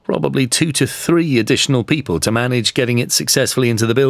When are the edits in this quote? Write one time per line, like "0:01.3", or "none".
none